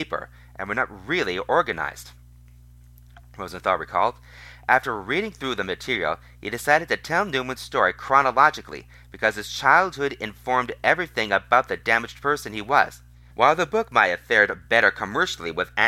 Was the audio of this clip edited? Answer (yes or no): yes